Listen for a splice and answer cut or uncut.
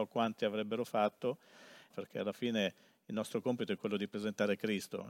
cut